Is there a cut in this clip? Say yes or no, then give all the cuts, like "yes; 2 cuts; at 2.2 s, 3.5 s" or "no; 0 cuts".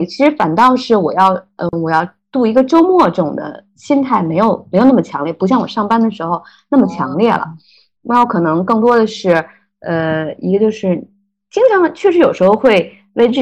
no; 0 cuts